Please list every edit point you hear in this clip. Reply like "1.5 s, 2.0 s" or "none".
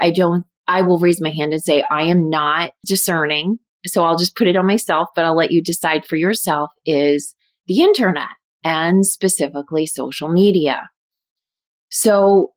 2.8 s